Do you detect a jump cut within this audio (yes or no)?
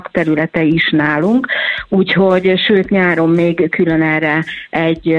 no